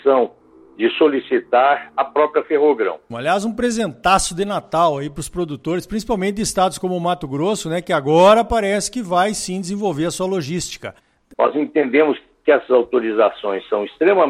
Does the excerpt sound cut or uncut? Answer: cut